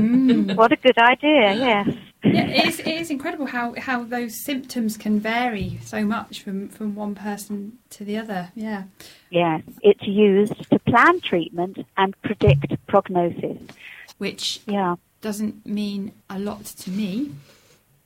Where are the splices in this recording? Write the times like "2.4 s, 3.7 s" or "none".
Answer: 9.8 s, 14.1 s, 16.2 s